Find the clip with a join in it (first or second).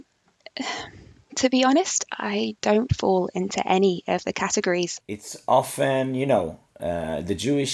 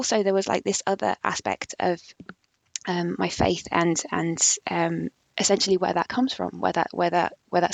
first